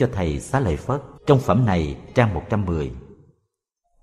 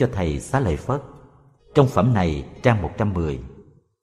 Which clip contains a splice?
first; 1 cut; at 1.2 s

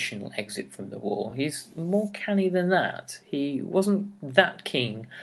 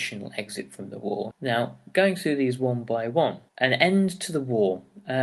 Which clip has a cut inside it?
second; 2 cuts; at 1.3 s, 3.5 s

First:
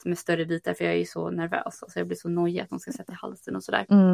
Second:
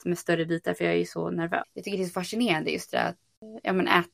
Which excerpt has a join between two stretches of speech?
second; 1 cut; at 1.6 s

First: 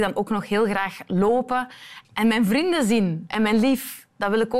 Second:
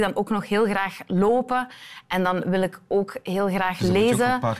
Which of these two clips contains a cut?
first; 1 cut; at 2.0 s

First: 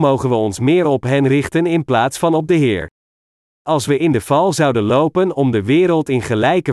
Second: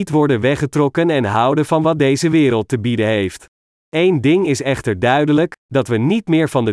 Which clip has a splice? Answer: second; 1 cut; at 3.8 s

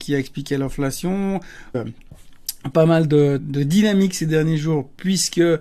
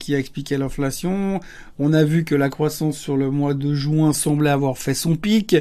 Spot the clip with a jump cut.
first; 2 cuts; at 1.7 s, 3.4 s

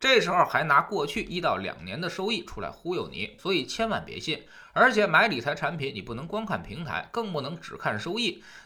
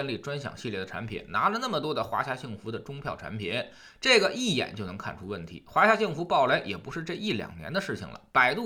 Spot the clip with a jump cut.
first; 1 cut; at 3.4 s

